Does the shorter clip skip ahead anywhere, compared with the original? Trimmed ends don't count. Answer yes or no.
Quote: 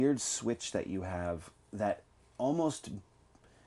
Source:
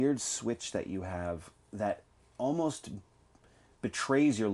no